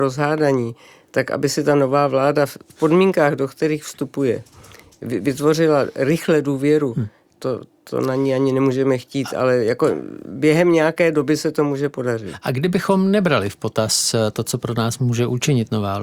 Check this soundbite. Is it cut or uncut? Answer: uncut